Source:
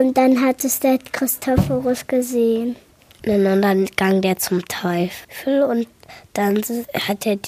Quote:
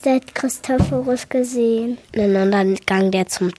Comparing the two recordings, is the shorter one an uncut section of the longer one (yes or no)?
no